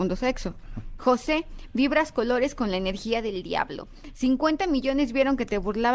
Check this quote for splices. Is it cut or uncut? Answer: cut